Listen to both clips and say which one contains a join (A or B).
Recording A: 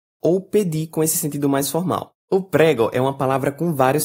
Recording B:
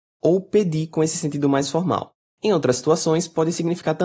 A